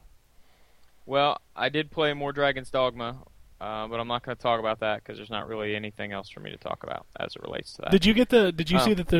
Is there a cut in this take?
no; 0 cuts

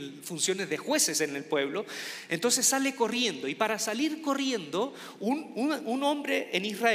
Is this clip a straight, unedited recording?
yes; 0 cuts

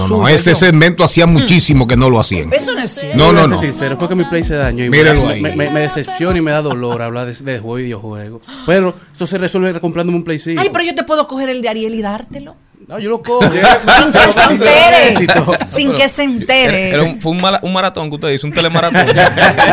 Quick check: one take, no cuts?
yes; 0 cuts

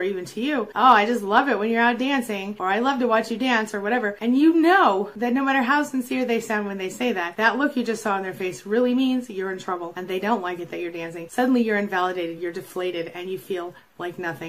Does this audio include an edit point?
no; 0 cuts

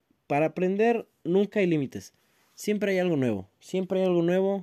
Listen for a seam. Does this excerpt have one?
no; 0 cuts

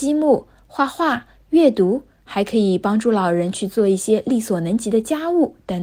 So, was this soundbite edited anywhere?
no; 0 cuts

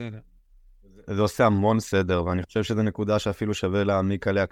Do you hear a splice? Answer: no; 0 cuts

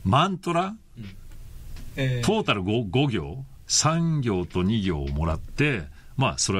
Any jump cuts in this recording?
yes; 1 cut; at 1.9 s

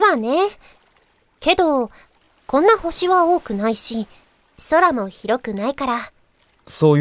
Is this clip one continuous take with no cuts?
yes; 0 cuts

